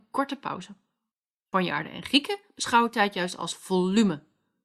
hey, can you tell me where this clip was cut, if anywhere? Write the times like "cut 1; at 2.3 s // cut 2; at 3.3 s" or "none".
none